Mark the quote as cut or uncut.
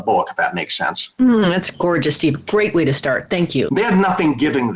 cut